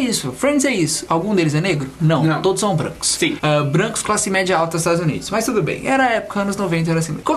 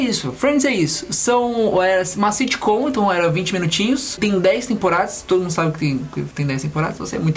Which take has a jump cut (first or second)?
first